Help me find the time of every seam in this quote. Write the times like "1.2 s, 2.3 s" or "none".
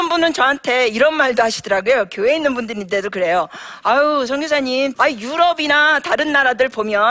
4.9 s